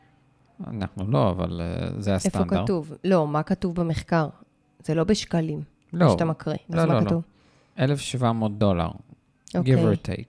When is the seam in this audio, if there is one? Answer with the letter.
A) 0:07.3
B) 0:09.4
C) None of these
C